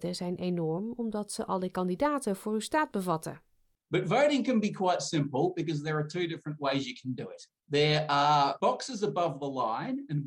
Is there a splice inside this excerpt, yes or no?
no